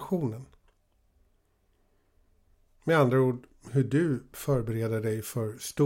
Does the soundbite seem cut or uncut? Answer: uncut